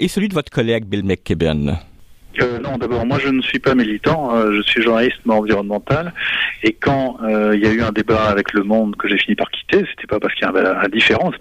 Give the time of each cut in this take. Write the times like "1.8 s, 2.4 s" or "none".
none